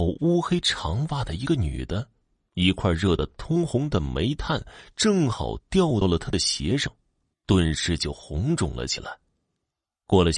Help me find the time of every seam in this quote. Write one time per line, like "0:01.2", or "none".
0:02.5
0:07.3